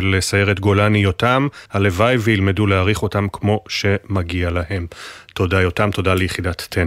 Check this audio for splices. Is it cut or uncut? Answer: cut